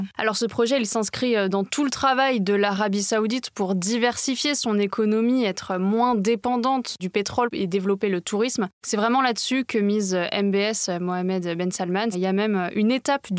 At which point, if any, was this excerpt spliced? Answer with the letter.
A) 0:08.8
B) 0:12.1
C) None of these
B